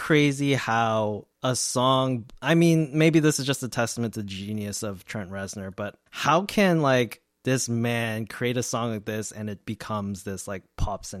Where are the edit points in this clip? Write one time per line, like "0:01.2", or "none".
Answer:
0:01.3
0:06.1
0:07.4